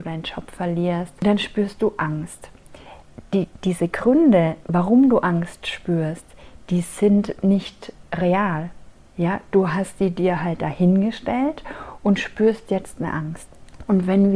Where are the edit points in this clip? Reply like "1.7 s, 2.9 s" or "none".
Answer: none